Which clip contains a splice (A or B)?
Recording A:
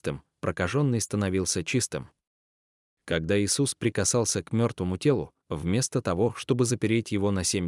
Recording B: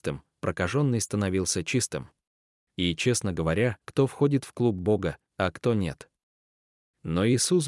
B